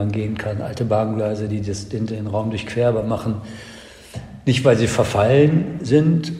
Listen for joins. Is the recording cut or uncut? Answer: uncut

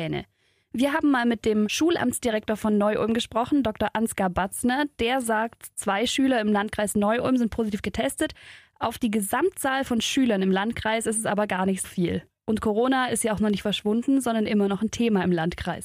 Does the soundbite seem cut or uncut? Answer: cut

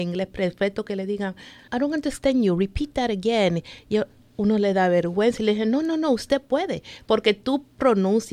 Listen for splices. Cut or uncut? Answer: cut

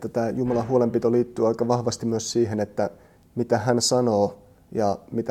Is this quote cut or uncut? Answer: uncut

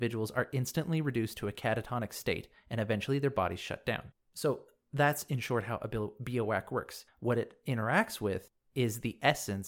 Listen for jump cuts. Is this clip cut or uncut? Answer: cut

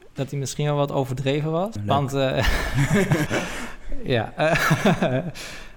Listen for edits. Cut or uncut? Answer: cut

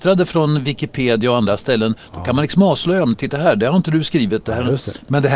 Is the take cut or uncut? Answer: uncut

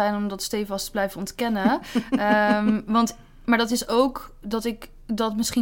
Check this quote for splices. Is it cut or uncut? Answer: uncut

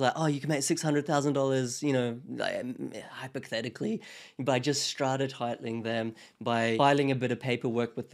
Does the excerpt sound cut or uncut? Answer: uncut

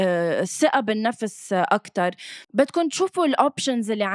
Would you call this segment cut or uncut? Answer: cut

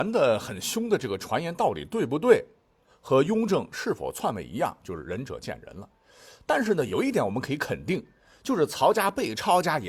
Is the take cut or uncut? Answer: uncut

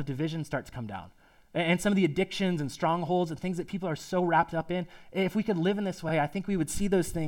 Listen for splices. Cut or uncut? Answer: uncut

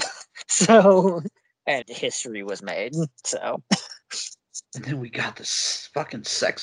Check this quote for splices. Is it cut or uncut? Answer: cut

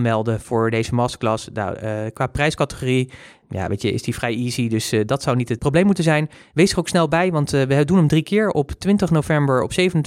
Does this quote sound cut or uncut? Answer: uncut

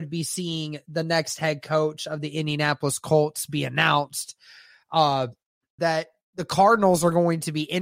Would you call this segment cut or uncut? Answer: cut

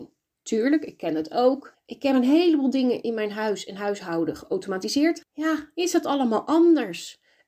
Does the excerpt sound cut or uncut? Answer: cut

